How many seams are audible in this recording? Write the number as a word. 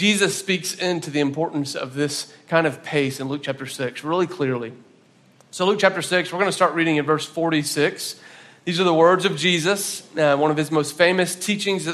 zero